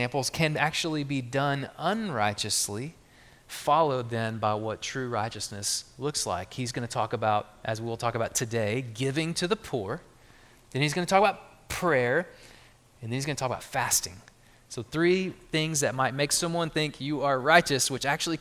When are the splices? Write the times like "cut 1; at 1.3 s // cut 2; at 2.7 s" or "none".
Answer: none